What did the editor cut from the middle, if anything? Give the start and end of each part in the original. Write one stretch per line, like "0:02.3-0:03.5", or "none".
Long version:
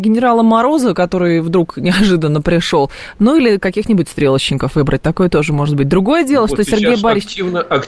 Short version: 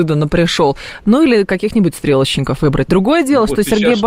0:05.0-0:05.9